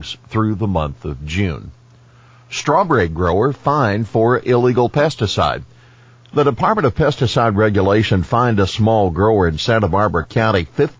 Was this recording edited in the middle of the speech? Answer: no; 0 cuts

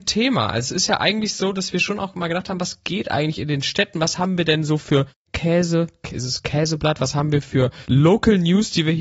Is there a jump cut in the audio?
no; 0 cuts

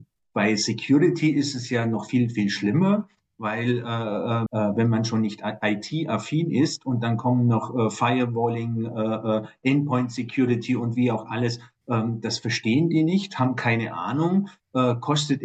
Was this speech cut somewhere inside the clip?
yes; 1 cut; at 4.5 s

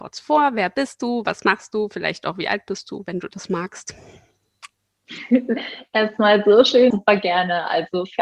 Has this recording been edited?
yes; 2 cuts; at 4.7 s, 6.9 s

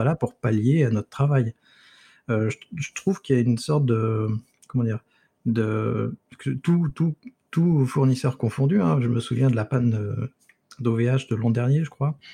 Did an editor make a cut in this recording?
no; 0 cuts

